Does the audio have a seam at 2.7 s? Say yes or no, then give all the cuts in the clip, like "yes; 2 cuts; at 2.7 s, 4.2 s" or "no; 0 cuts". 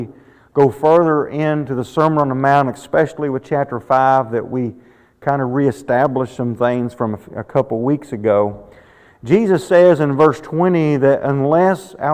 no; 0 cuts